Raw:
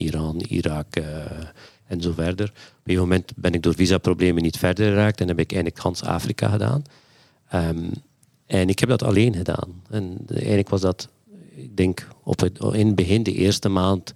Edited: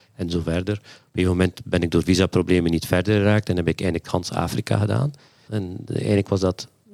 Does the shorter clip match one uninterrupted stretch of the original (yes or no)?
no